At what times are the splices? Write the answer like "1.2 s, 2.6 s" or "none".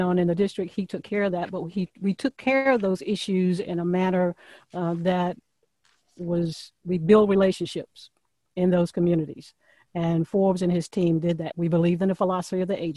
11.5 s